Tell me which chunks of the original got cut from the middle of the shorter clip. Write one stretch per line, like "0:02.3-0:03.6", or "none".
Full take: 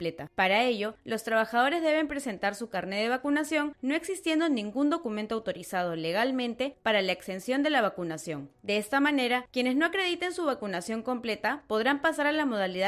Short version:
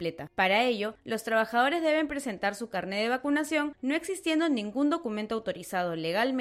none